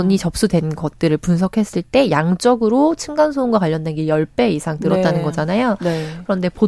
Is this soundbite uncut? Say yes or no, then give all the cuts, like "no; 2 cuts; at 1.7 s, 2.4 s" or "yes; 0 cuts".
yes; 0 cuts